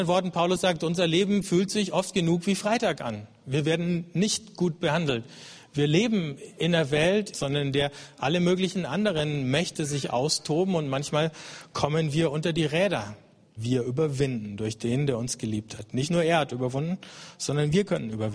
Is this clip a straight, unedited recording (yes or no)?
no